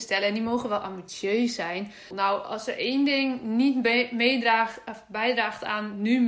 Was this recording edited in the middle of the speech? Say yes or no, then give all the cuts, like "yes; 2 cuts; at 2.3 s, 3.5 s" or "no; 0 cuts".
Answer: yes; 1 cut; at 2.1 s